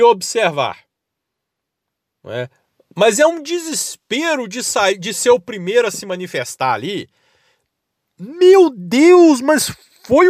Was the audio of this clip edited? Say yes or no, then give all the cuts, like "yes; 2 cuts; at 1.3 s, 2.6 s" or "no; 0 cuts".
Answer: no; 0 cuts